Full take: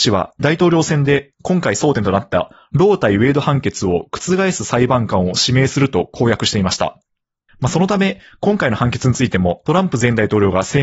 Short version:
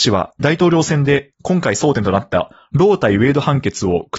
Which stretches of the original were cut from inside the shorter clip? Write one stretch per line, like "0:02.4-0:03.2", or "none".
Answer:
none